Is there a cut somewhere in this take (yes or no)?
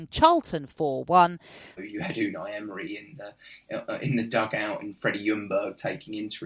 yes